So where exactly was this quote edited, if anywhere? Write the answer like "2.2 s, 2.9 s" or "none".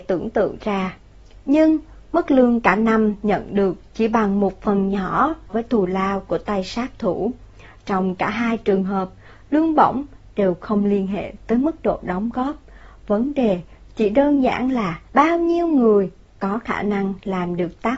5.5 s, 15.1 s